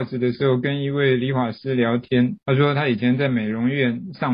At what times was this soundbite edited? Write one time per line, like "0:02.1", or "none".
0:02.4